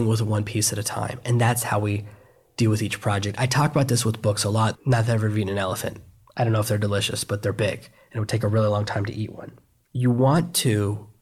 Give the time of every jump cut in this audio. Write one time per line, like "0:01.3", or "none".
0:04.7